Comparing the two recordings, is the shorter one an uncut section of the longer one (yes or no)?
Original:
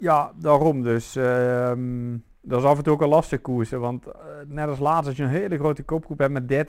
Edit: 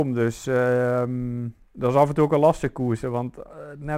yes